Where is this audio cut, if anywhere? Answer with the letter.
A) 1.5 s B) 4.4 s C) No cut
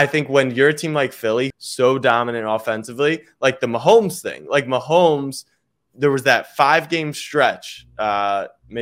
A